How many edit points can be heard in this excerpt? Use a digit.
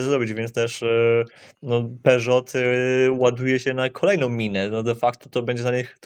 0